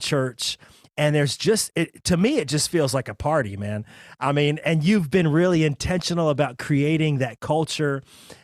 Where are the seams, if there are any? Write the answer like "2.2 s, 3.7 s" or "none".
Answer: 4.6 s